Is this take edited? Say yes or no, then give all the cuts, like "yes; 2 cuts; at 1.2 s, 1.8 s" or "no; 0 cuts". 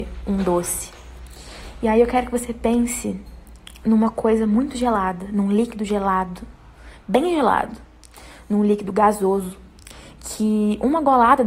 no; 0 cuts